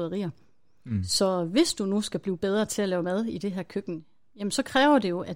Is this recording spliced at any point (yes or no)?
no